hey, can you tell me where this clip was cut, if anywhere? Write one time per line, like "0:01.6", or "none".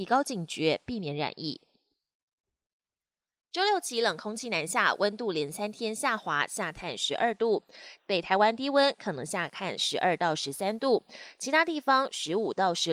0:08.0